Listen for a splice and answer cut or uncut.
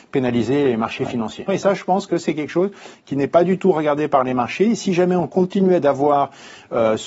cut